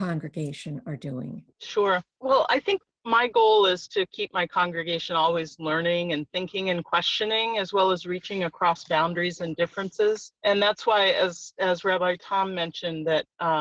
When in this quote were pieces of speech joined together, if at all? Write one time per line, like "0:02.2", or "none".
none